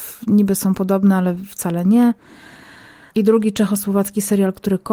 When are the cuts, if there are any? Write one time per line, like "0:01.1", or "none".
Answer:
0:03.1